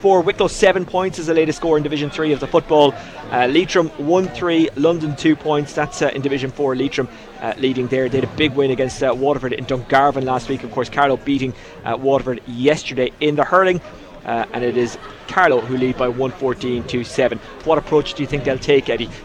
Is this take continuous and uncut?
no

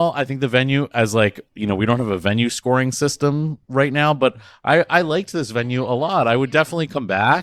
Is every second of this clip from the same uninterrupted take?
yes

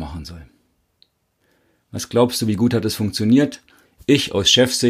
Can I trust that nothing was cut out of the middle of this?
yes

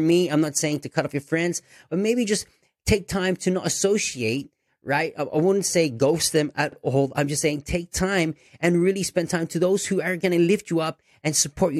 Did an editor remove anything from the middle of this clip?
no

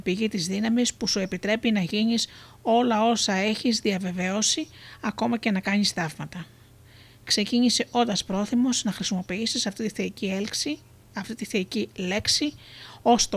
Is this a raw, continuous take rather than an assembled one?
yes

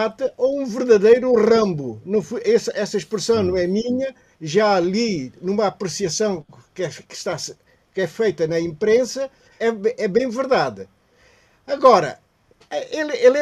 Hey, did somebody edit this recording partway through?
yes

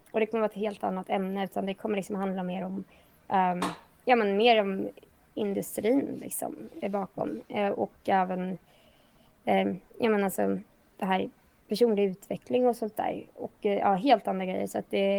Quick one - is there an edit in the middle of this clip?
no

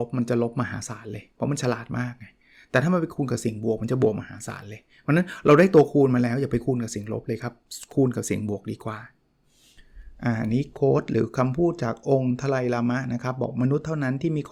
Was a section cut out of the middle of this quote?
no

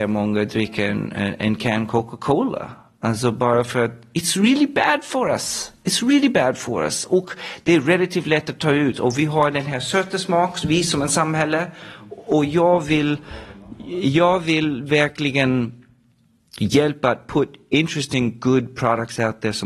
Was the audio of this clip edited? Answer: no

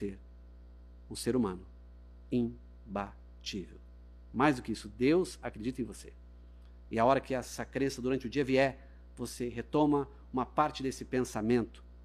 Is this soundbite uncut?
no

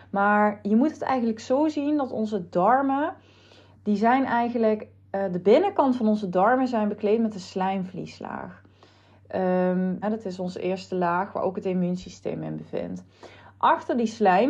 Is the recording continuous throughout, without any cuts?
no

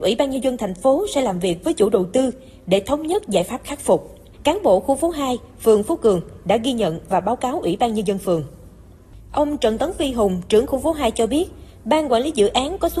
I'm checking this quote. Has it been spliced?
yes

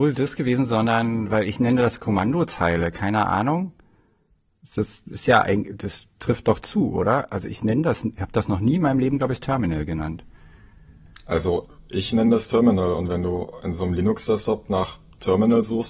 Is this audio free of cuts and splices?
yes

